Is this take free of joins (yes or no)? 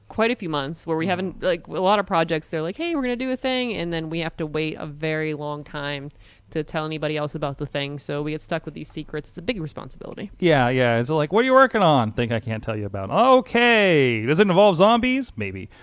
yes